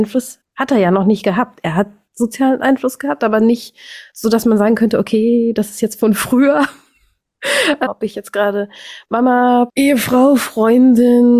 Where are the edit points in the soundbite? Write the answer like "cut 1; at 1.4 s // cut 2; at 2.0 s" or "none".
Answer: cut 1; at 7.9 s // cut 2; at 9.7 s

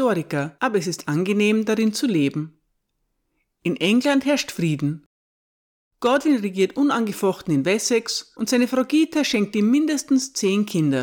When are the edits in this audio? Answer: none

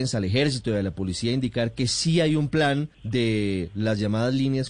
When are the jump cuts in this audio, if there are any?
cut 1; at 2.9 s

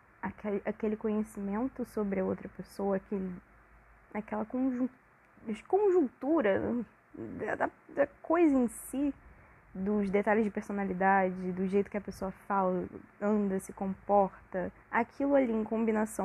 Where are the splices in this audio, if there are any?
cut 1; at 13.6 s // cut 2; at 14.8 s

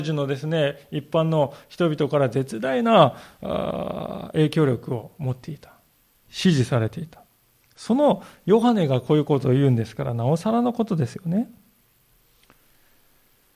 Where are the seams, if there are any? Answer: none

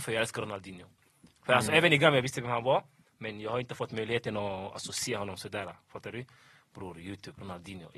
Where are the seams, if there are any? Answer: none

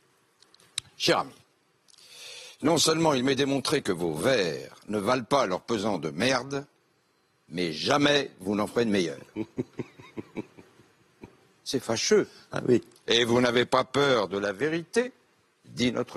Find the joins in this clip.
cut 1; at 13.0 s

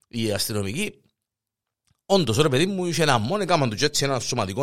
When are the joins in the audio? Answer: none

